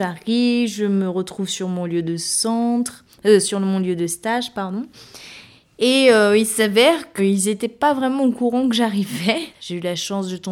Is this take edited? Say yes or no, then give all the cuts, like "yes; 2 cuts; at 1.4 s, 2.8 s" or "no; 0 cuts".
yes; 2 cuts; at 7.2 s, 9.5 s